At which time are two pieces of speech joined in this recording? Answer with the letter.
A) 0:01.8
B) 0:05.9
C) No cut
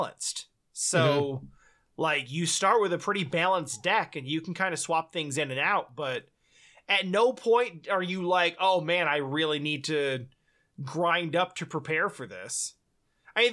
C